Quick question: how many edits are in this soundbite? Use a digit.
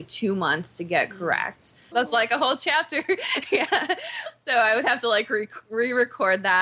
1